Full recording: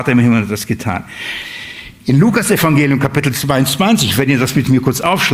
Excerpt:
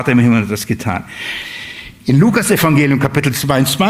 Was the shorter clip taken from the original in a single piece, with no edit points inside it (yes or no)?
yes